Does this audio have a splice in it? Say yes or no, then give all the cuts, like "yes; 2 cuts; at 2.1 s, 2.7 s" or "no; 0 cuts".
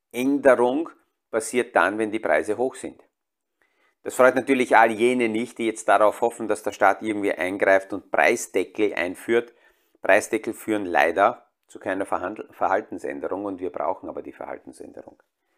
no; 0 cuts